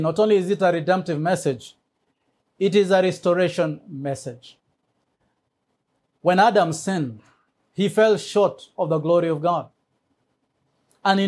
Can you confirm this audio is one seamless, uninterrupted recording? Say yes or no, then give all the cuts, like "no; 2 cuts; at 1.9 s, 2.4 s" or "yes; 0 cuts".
yes; 0 cuts